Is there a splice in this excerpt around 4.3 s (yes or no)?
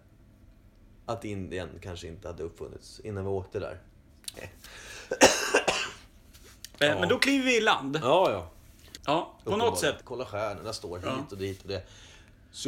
yes